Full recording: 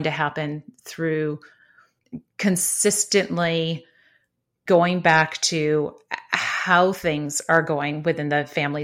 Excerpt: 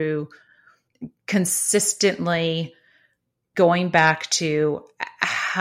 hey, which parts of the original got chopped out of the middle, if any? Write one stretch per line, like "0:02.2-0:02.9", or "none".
none